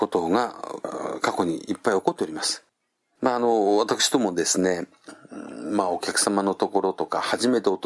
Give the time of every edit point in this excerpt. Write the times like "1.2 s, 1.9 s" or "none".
none